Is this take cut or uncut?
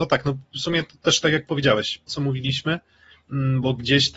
cut